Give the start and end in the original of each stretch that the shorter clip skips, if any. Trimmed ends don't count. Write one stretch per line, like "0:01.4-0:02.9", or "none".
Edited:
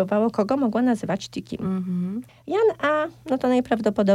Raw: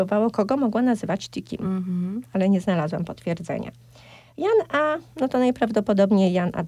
0:02.3-0:04.2